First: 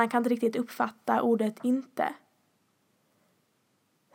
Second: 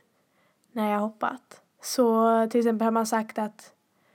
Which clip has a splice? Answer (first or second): second